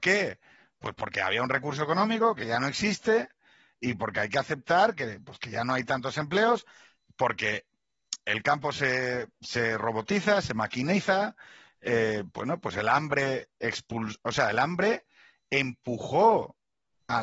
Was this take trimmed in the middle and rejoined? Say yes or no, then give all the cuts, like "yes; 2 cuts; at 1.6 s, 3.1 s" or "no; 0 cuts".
yes; 1 cut; at 12.3 s